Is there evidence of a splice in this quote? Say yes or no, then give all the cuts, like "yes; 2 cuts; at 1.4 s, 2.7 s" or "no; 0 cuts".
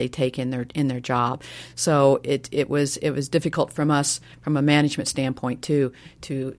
no; 0 cuts